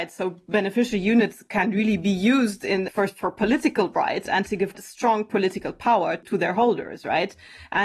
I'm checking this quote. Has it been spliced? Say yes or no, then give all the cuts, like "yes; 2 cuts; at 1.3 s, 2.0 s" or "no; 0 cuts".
yes; 2 cuts; at 2.9 s, 4.7 s